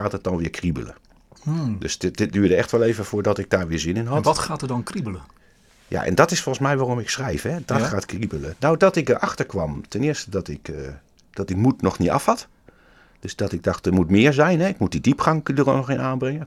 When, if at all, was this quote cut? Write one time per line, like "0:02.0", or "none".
none